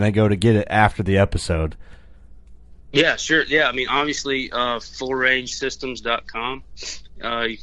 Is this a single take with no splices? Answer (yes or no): yes